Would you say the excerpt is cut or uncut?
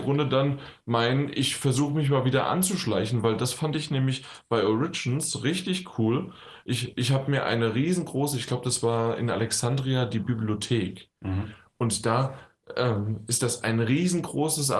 uncut